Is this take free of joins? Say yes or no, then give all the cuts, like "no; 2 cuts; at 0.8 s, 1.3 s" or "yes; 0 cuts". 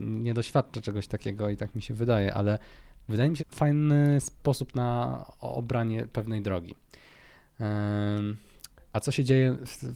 no; 1 cut; at 3.4 s